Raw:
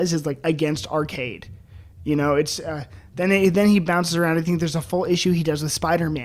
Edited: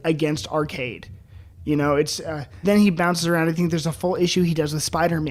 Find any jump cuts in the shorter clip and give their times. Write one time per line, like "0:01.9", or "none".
0:02.6